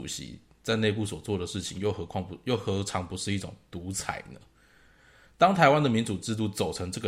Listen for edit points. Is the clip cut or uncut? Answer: uncut